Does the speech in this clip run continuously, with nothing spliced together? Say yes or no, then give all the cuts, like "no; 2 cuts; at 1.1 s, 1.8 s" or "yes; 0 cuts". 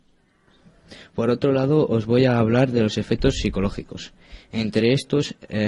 yes; 0 cuts